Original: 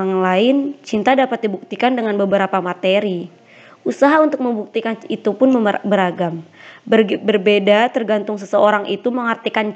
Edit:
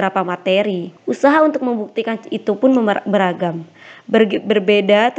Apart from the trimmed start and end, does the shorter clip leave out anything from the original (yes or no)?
yes